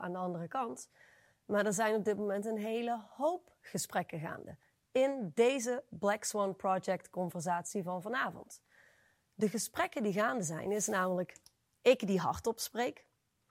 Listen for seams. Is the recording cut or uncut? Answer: uncut